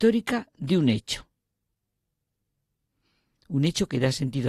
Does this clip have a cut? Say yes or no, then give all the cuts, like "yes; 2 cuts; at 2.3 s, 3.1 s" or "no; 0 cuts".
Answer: no; 0 cuts